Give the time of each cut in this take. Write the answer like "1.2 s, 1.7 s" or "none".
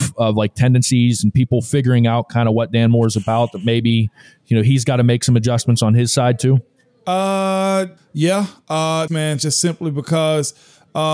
8.0 s, 9.1 s